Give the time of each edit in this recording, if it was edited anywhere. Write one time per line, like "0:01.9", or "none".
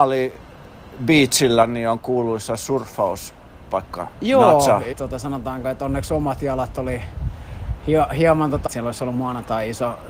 0:04.9
0:08.7